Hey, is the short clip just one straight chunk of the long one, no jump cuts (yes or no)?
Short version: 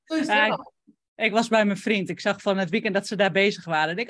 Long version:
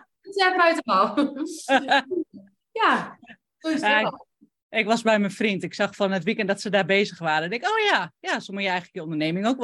yes